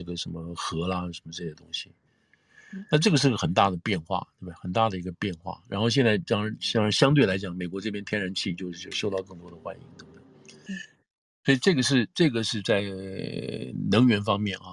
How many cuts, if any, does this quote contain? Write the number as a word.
one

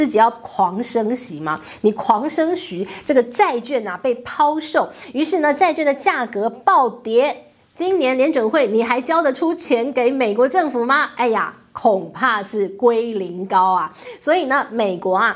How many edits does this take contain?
zero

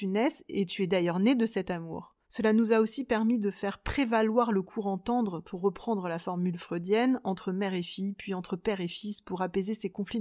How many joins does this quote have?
one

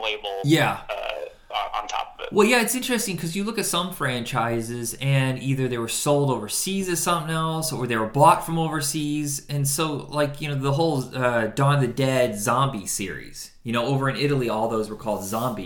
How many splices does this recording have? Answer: zero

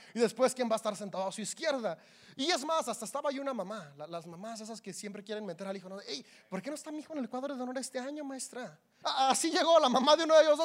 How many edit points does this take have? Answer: one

